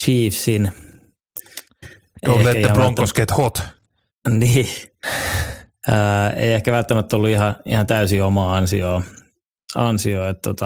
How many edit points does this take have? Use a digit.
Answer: 0